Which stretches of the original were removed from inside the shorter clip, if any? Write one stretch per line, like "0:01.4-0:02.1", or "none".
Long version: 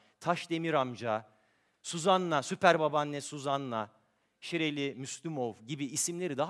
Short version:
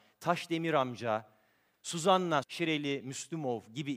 0:02.4-0:04.4

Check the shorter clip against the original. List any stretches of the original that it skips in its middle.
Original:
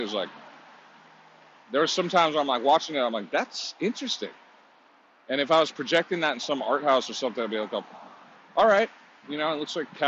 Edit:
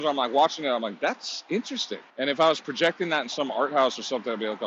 0:04.4-0:05.2

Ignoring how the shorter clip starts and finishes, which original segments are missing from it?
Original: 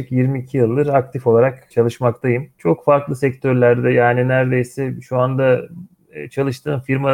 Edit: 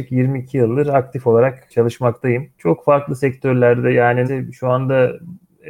0:04.3-0:04.7

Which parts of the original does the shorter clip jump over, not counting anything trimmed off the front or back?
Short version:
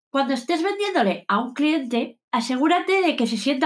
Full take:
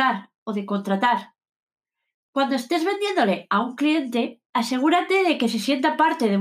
none

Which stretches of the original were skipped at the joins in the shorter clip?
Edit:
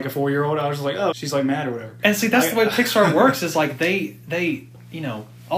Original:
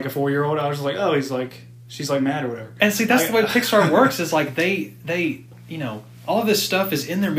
0:01.1-0:01.9

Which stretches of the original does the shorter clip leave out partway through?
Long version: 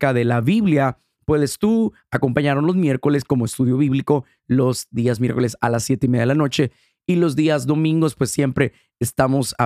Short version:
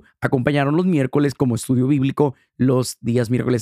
none

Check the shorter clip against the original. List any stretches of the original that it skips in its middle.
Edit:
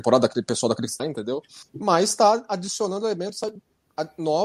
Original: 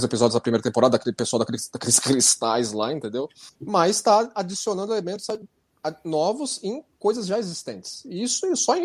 0:01.7-0:02.9

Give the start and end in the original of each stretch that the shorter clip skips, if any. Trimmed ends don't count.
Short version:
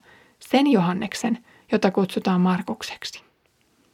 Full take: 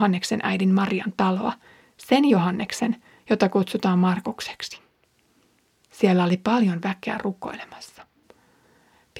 none

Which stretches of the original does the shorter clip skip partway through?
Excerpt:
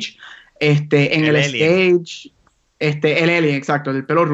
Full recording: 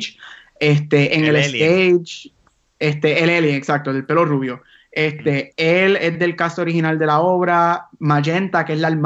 none

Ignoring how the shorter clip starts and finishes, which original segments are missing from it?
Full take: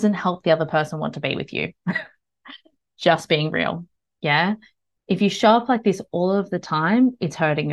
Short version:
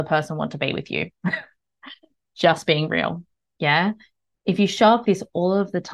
0:05.7-0:05.8

